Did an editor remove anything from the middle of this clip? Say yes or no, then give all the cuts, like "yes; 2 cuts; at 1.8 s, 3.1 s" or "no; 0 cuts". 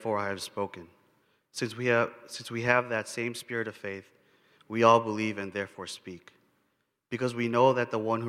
no; 0 cuts